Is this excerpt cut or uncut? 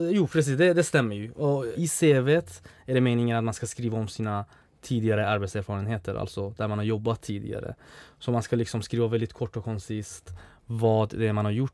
uncut